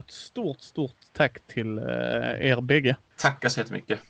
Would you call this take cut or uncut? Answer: uncut